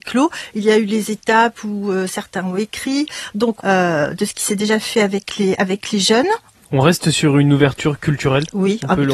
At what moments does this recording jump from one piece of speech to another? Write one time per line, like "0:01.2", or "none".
0:03.6
0:06.5